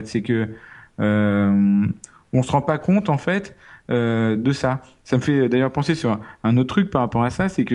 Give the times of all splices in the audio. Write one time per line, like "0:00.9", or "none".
none